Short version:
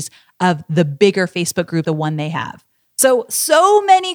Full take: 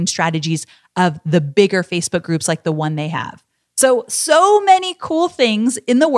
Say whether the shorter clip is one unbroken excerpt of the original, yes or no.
no